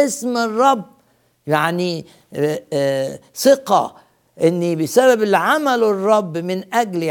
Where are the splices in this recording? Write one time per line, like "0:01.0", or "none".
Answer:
none